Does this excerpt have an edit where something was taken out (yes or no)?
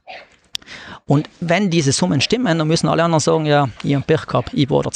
yes